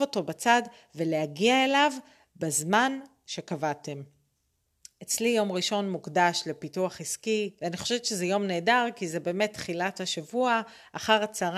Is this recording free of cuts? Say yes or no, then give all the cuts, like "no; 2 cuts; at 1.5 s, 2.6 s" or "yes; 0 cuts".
no; 1 cut; at 7.6 s